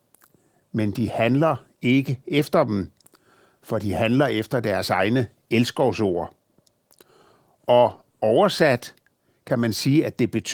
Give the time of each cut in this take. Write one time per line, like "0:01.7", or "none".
none

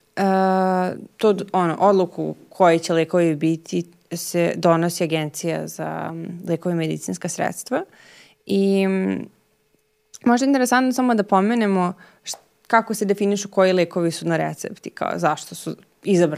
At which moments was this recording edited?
none

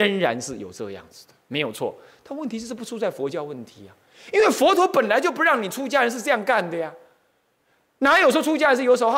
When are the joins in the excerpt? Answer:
none

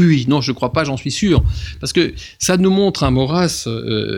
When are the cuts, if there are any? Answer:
none

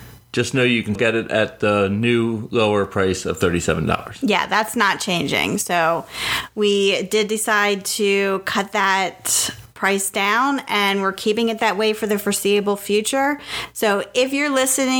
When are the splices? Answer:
0:01.0

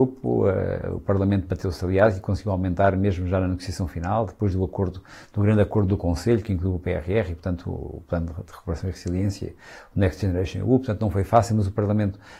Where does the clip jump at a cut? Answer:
none

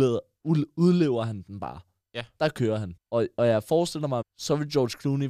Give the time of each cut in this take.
0:03.0
0:04.2

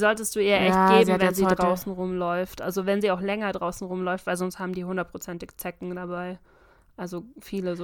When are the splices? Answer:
none

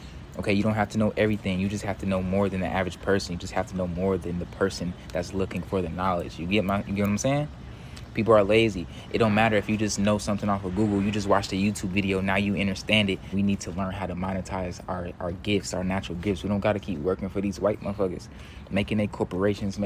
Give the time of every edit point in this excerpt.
0:13.3

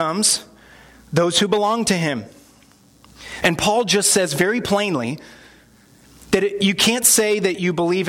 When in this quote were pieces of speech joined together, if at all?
0:03.4

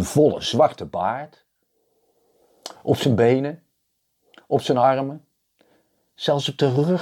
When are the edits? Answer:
none

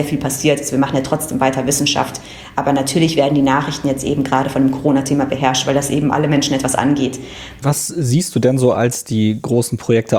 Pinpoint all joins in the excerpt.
0:07.6

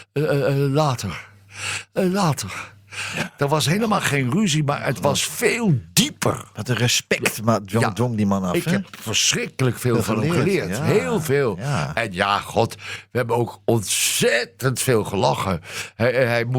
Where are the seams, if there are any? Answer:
none

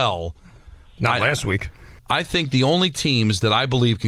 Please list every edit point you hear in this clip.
0:02.0

